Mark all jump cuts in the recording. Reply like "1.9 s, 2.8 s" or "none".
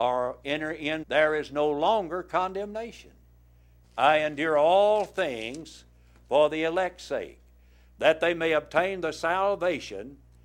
1.0 s, 3.8 s